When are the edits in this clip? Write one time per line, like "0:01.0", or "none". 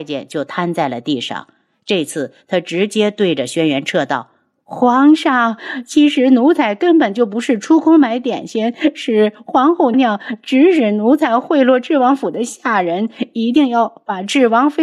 0:09.9